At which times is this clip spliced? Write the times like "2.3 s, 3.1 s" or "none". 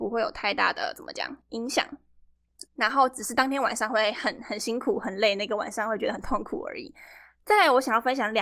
2.6 s